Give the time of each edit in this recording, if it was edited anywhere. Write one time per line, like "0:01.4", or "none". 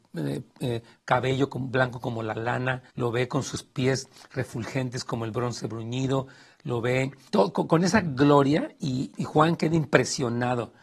0:02.9
0:07.3
0:09.1